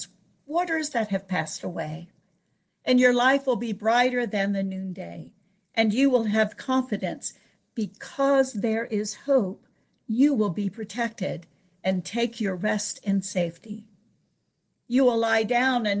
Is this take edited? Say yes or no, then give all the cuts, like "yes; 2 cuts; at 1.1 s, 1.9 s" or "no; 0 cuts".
yes; 1 cut; at 5.6 s